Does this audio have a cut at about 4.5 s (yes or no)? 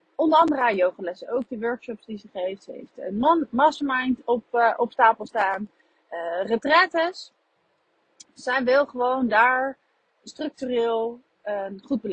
no